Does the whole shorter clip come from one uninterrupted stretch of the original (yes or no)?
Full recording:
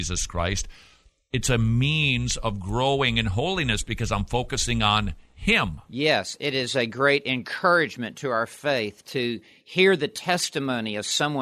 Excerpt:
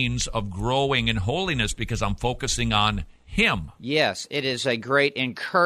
yes